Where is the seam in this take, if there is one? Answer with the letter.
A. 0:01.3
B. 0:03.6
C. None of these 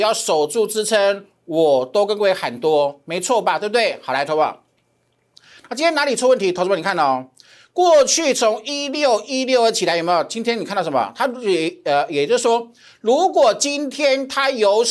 C